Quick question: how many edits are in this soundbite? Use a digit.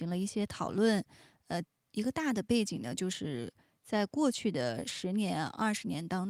0